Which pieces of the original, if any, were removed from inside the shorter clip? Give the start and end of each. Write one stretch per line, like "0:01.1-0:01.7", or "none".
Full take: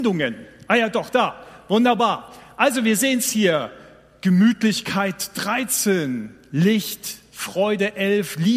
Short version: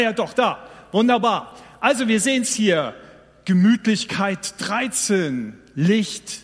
none